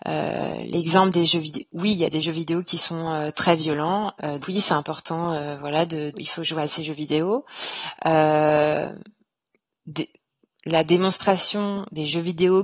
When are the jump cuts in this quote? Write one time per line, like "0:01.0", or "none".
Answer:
0:04.4
0:06.1